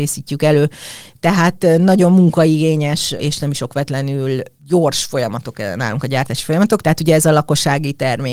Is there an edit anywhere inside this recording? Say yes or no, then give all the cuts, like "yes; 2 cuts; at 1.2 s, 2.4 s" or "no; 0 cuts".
yes; 1 cut; at 6.8 s